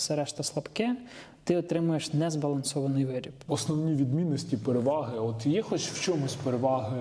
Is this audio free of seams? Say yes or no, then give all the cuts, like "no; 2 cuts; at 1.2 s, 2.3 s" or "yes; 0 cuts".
no; 1 cut; at 3.5 s